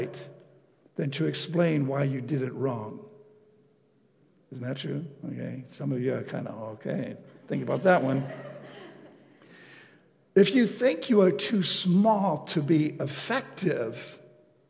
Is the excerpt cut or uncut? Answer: uncut